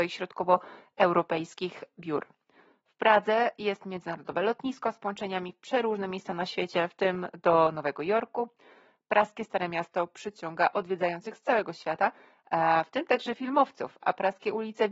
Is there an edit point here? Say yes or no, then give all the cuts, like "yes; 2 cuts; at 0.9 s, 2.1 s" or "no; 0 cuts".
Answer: no; 0 cuts